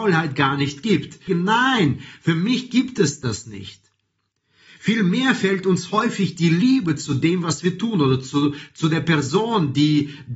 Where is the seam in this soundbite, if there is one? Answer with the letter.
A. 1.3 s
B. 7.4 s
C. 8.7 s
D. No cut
A